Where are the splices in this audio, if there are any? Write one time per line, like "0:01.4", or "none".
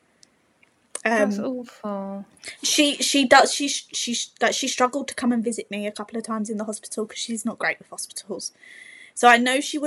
none